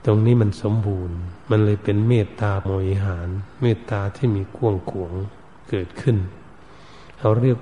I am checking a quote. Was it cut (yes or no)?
yes